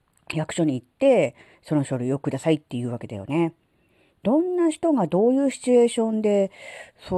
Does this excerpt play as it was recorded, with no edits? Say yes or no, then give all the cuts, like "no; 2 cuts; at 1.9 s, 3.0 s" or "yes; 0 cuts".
yes; 0 cuts